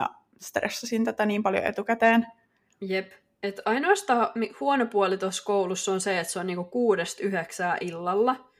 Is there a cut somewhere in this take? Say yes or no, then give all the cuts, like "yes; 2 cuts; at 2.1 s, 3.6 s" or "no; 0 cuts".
no; 0 cuts